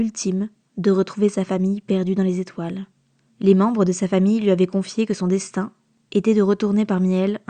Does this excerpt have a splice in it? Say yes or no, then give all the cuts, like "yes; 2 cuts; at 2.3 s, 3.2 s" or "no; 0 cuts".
yes; 1 cut; at 3.3 s